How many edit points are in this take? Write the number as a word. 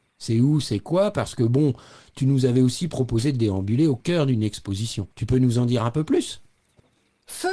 one